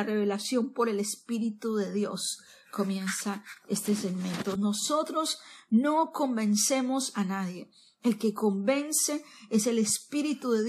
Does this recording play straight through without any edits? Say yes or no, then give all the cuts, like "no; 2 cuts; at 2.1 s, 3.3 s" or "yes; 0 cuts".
no; 1 cut; at 4.6 s